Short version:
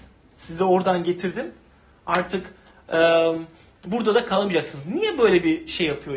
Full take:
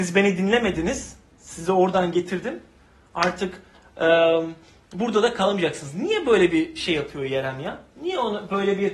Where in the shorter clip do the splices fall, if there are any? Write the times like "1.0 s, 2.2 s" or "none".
none